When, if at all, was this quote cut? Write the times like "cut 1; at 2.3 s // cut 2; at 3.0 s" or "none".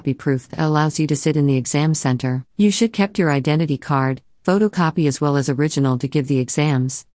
cut 1; at 2.5 s